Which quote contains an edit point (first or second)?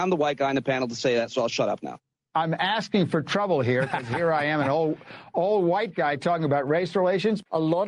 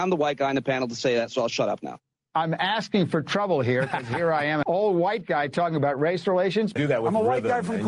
second